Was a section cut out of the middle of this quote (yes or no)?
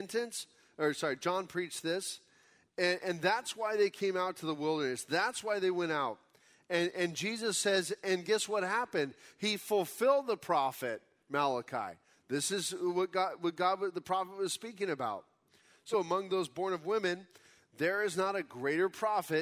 yes